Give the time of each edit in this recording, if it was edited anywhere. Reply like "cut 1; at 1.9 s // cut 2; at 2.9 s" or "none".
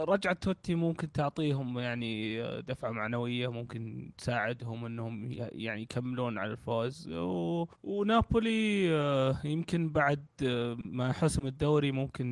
cut 1; at 7.7 s

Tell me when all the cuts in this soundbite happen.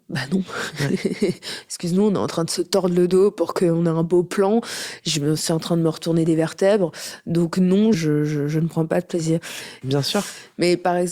cut 1; at 7.9 s // cut 2; at 9.8 s

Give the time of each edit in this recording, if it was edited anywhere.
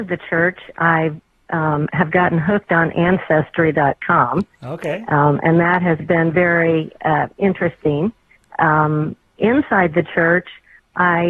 none

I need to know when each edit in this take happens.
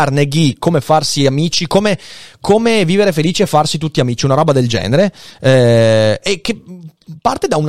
none

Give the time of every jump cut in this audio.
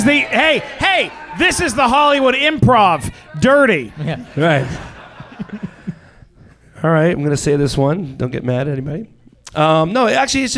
none

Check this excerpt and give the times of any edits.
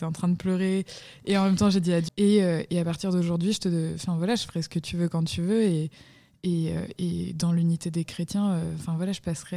cut 1; at 2.1 s

